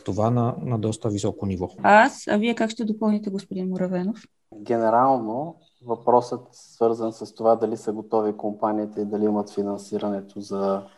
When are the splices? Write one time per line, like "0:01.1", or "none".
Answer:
0:01.8